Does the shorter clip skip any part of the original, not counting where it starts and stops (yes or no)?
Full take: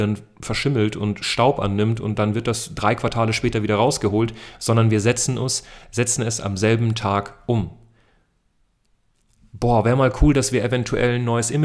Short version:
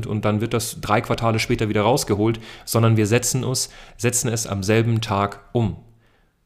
no